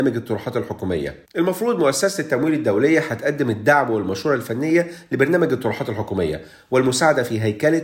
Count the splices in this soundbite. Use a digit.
1